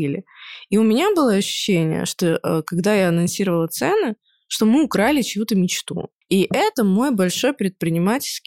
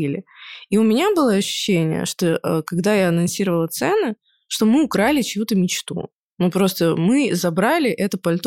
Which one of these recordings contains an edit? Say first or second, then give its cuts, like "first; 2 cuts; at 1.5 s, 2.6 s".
first; 1 cut; at 6.2 s